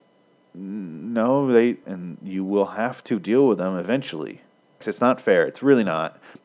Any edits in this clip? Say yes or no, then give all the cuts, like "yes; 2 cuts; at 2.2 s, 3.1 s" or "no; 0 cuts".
yes; 2 cuts; at 1.8 s, 4.8 s